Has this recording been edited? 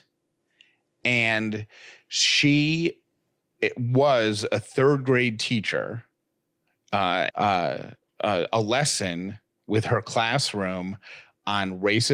yes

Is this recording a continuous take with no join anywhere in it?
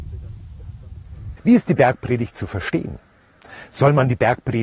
no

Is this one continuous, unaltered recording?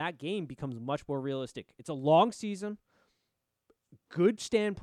yes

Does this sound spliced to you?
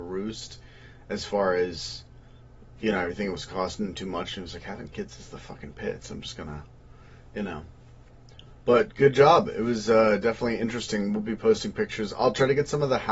no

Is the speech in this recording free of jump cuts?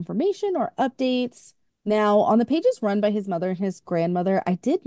no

